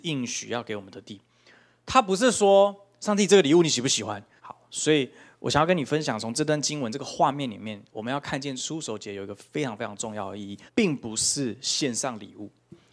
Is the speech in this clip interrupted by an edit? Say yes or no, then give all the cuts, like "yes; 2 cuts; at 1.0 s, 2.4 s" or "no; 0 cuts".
yes; 2 cuts; at 4.4 s, 10.7 s